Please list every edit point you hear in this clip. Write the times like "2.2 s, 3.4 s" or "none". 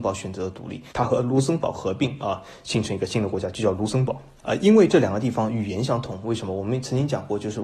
0.9 s, 4.4 s